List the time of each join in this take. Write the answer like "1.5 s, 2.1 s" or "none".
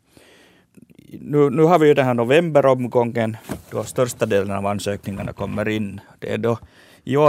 none

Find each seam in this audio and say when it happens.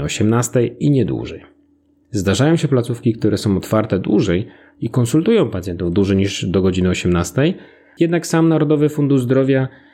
none

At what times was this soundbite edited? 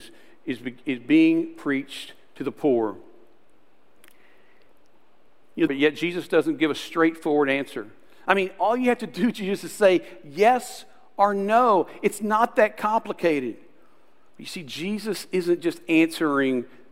5.7 s

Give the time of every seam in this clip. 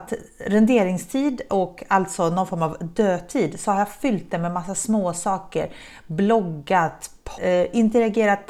7.4 s

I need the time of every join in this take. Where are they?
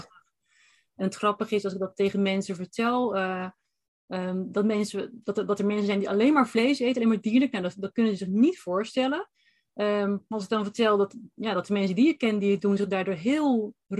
none

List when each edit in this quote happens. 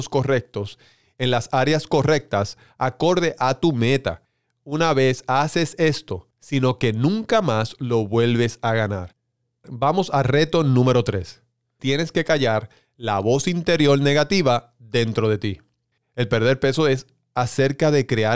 6.3 s, 16.0 s

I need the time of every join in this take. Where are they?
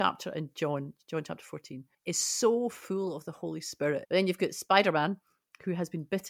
1.9 s, 4.0 s

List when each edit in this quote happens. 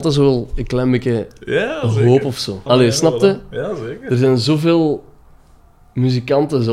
2.7 s

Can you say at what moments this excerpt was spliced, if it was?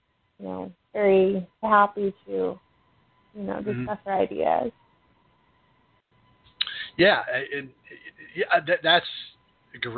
1.6 s

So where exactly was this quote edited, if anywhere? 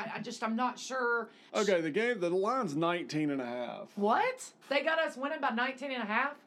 1.5 s, 4.6 s

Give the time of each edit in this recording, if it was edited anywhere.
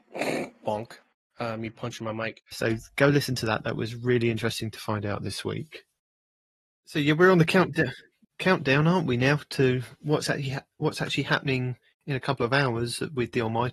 2.5 s

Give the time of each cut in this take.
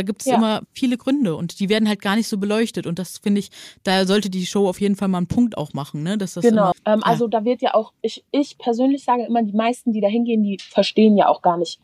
6.7 s, 8.3 s

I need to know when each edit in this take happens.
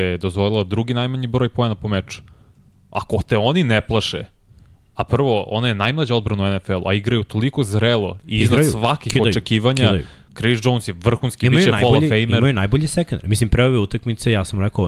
none

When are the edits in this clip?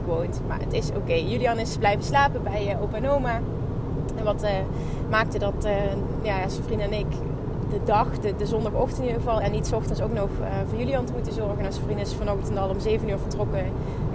7.6 s, 9.4 s

